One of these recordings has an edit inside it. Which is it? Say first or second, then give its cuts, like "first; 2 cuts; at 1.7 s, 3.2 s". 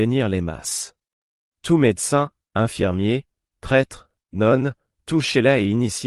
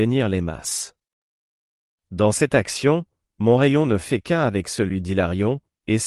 first; 2 cuts; at 1.5 s, 4.9 s